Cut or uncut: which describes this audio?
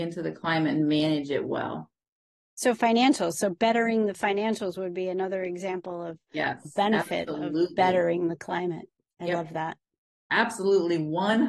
uncut